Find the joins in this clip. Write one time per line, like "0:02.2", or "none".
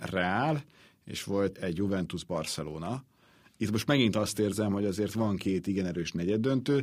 0:01.5